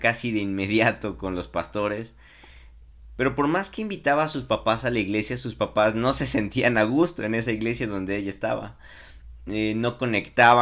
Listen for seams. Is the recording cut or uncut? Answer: cut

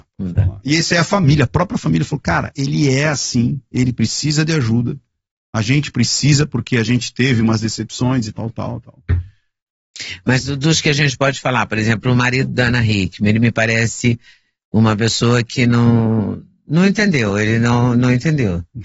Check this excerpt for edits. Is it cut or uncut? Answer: cut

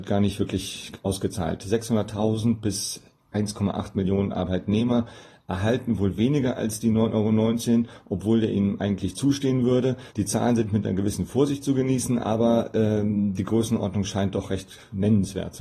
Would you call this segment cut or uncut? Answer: cut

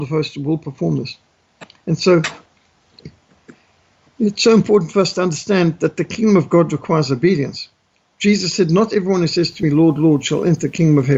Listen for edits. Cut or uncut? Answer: uncut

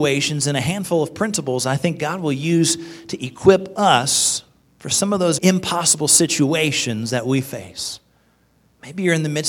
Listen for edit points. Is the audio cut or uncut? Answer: cut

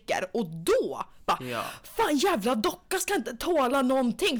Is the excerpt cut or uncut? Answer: uncut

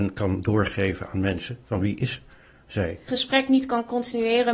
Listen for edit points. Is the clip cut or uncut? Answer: cut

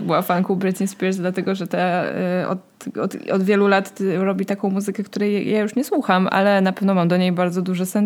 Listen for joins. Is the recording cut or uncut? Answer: uncut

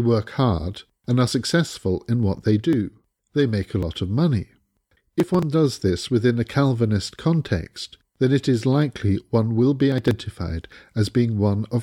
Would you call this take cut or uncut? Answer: cut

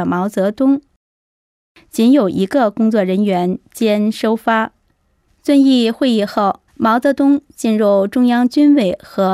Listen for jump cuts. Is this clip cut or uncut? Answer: cut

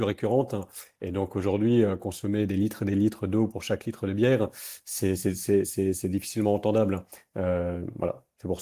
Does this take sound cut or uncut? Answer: uncut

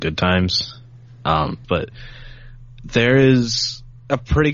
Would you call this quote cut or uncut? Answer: cut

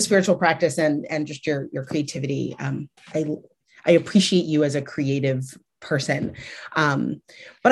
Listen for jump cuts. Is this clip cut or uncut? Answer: cut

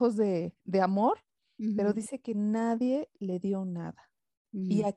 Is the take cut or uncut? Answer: uncut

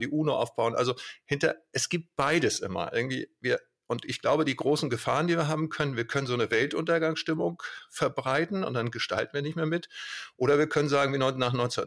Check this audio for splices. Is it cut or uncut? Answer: uncut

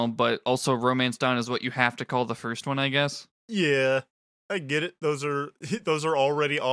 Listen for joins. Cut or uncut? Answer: uncut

